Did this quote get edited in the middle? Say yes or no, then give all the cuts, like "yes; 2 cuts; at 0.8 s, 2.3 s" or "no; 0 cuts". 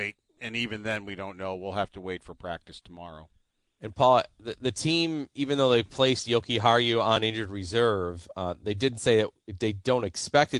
no; 0 cuts